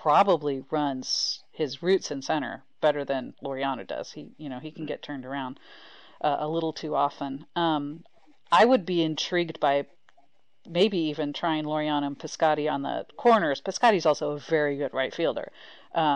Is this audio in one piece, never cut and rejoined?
yes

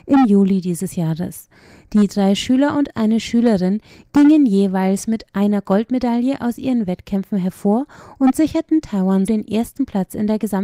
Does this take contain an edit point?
yes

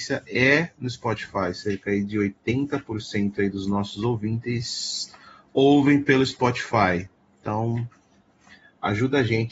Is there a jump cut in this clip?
no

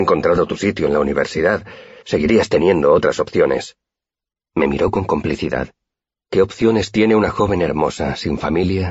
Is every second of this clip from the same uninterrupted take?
no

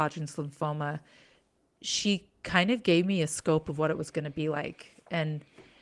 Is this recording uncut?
yes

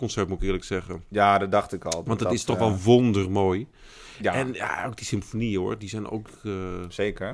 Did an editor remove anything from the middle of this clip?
no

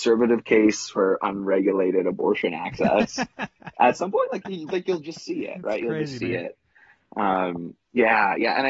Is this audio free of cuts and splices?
yes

